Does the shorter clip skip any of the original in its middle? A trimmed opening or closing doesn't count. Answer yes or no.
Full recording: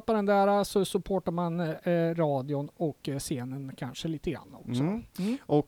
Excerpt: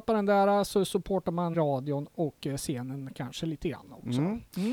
yes